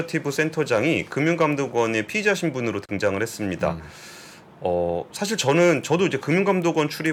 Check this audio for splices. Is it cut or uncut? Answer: uncut